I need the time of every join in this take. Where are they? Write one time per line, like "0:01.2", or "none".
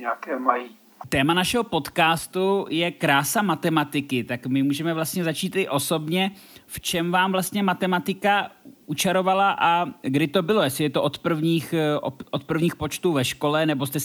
none